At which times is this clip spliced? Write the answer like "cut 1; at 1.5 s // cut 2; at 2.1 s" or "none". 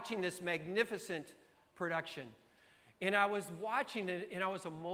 none